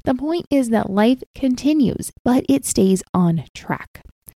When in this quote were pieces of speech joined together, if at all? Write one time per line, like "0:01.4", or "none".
0:02.1